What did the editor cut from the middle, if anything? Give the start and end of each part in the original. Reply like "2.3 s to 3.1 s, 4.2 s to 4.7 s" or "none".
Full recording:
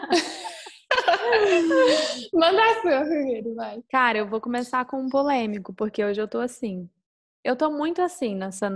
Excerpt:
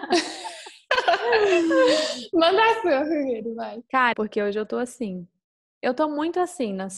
4.1 s to 5.7 s